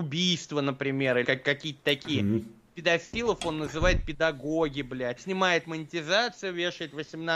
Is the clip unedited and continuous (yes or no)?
no